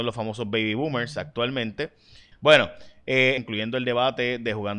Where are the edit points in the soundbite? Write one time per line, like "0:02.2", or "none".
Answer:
0:02.3
0:03.4